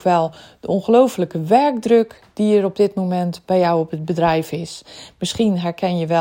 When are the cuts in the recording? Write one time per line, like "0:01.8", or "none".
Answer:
none